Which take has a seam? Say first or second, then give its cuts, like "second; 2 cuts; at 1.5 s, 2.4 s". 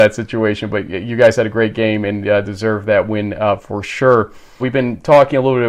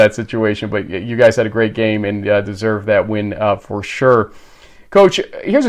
first; 1 cut; at 4.6 s